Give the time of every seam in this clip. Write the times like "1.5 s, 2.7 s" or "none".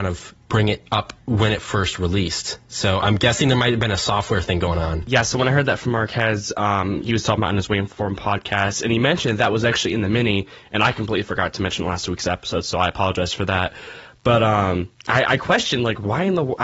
1.2 s

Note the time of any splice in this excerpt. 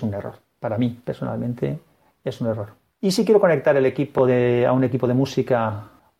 none

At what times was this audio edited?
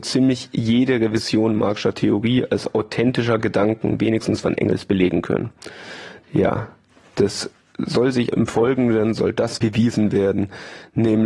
6.2 s, 8.3 s, 9.6 s

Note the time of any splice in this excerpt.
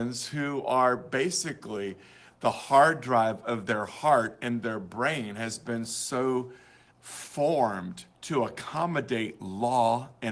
6.9 s, 8.1 s

